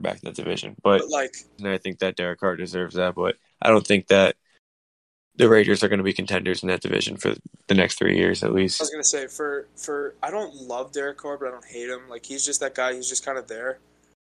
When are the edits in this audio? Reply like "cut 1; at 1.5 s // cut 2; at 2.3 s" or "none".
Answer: cut 1; at 1.6 s